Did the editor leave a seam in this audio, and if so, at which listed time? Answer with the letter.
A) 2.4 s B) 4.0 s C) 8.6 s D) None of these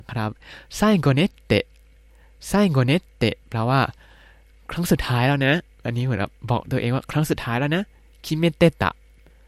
D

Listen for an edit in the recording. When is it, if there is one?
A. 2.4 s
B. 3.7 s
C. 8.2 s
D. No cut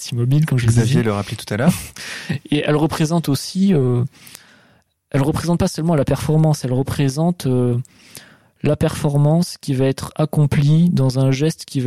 D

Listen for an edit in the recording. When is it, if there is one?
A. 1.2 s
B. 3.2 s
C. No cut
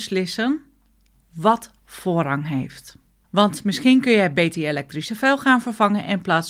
C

